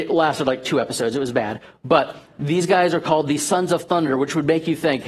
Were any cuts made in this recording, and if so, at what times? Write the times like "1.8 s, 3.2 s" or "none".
none